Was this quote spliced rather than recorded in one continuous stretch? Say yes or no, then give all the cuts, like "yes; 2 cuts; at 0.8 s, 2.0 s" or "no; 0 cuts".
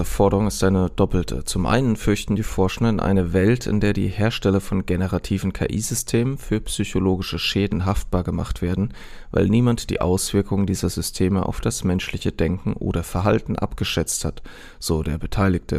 no; 0 cuts